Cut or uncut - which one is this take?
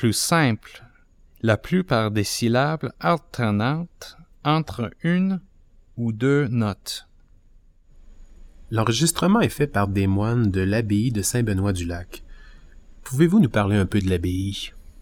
uncut